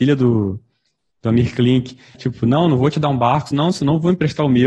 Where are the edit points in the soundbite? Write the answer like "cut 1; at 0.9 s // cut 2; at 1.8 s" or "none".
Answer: cut 1; at 2.1 s